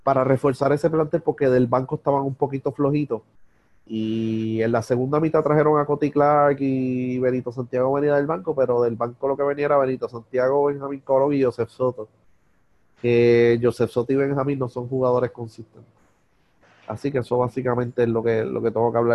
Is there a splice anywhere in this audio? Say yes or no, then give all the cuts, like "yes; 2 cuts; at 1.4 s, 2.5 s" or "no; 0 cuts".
no; 0 cuts